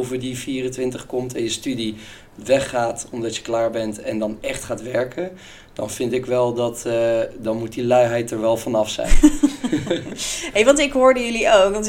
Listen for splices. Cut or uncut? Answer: uncut